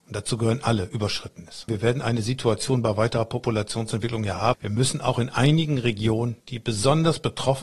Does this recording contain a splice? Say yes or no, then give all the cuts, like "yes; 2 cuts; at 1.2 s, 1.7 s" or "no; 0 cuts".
yes; 3 cuts; at 1.7 s, 4.5 s, 6.4 s